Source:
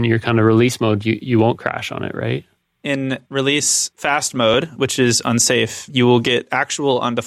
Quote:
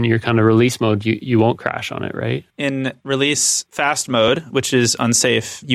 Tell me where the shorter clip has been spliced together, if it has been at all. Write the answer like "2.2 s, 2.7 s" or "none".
2.5 s